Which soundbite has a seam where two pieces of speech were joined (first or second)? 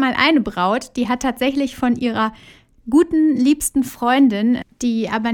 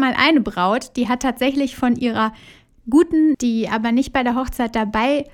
second